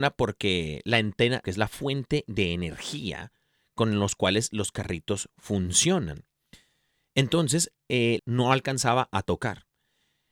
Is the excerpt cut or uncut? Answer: cut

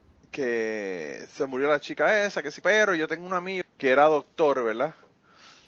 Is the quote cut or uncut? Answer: cut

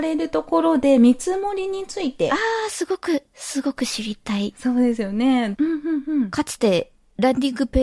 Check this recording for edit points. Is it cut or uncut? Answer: cut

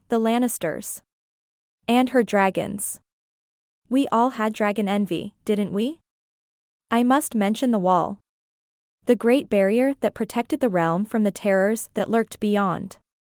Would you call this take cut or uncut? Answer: cut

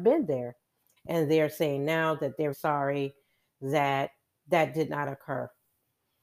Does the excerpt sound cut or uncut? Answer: cut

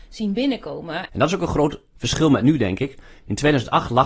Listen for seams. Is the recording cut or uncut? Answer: cut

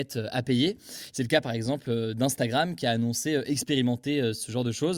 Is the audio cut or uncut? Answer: cut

